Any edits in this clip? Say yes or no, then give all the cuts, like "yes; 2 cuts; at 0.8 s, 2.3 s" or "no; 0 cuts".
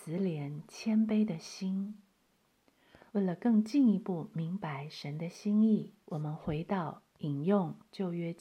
yes; 2 cuts; at 3.1 s, 6.0 s